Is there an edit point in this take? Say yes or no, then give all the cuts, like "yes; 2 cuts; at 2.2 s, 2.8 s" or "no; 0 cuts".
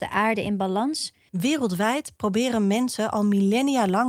yes; 1 cut; at 1.3 s